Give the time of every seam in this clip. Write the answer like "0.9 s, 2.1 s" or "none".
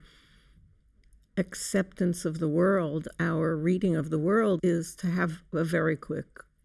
4.6 s